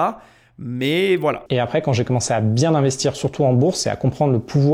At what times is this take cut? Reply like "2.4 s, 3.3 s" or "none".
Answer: 1.5 s